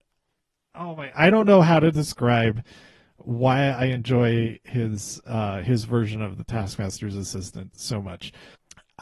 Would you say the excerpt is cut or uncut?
uncut